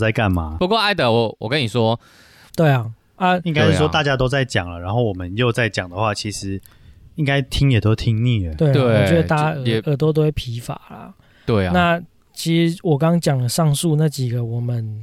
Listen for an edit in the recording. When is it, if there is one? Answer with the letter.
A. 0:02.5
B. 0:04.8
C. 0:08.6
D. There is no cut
A